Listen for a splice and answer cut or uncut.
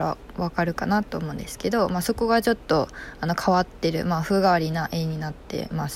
uncut